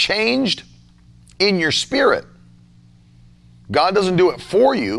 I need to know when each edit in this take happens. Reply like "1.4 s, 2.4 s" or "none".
3.6 s